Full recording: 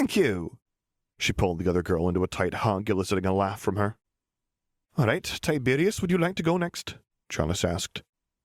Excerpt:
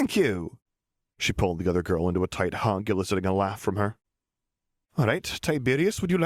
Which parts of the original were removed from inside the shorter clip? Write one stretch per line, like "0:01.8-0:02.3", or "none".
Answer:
none